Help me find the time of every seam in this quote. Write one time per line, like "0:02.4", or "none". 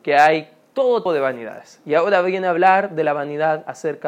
0:01.1